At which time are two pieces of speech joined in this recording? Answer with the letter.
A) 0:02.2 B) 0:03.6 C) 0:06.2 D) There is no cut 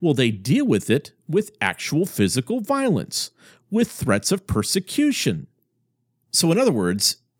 D